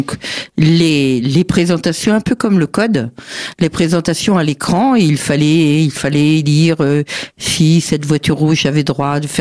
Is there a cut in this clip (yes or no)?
no